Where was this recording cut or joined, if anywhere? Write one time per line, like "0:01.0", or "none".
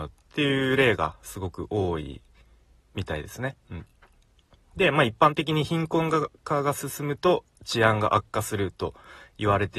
none